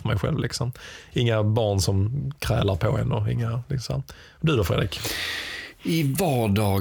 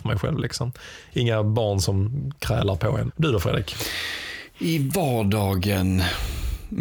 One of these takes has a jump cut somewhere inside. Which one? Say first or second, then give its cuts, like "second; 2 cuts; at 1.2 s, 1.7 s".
second; 1 cut; at 3.1 s